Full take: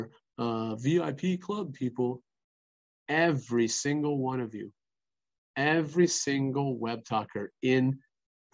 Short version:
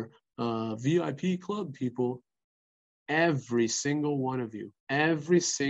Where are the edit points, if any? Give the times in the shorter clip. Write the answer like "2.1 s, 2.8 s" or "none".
4.8 s